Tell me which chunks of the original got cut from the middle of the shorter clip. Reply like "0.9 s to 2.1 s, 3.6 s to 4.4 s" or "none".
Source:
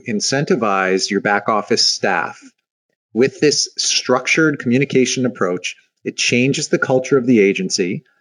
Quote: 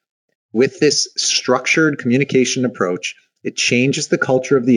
none